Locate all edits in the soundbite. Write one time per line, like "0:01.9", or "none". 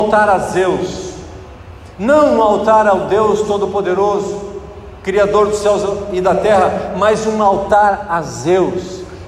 none

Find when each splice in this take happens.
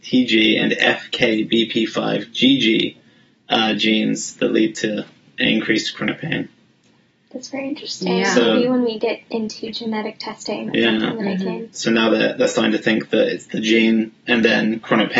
none

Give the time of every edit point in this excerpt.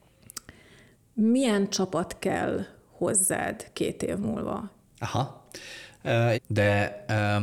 0:04.8
0:06.3

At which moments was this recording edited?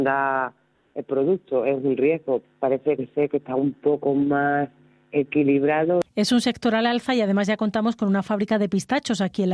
0:02.4

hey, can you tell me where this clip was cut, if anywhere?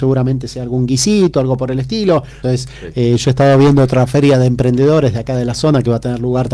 0:02.4

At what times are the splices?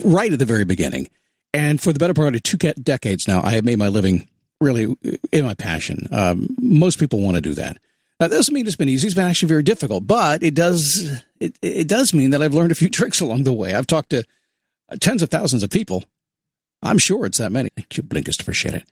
0:17.7

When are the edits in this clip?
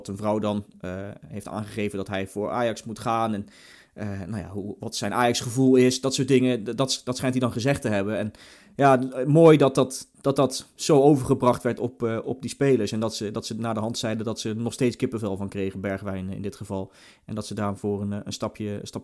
none

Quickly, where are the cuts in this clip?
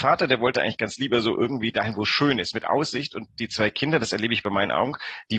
none

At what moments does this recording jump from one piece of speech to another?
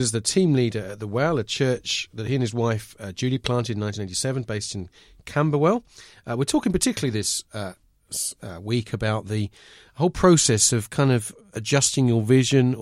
none

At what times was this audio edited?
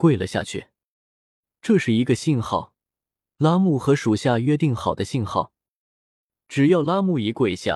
none

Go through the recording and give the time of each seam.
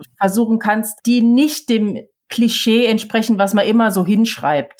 0:01.0

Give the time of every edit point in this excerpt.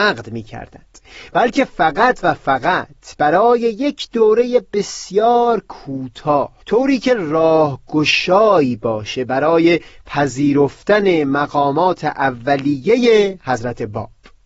0:06.6

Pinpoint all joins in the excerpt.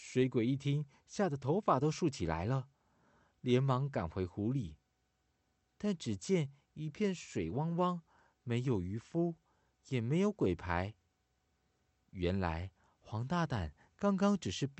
none

